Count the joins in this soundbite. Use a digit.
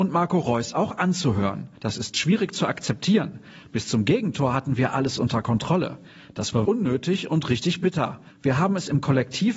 3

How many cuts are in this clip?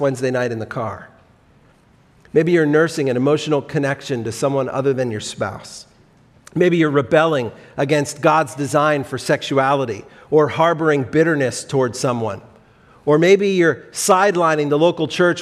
0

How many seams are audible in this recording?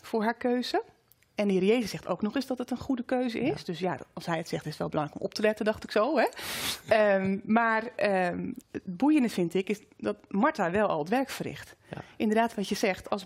1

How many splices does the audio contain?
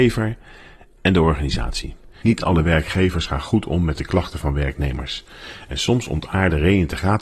1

